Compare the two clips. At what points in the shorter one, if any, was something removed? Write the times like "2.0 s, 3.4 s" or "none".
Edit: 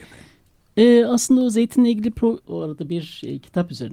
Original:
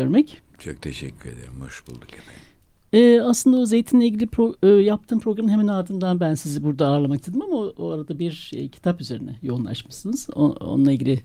2.4 s